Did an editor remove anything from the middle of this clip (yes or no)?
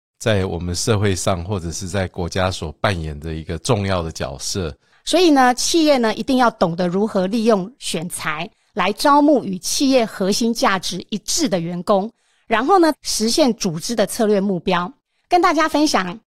yes